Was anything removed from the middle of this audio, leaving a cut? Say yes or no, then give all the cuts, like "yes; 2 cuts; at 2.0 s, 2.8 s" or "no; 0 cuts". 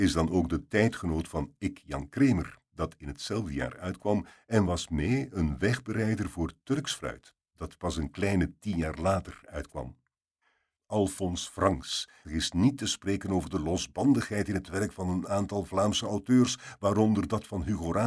yes; 2 cuts; at 10.8 s, 12.2 s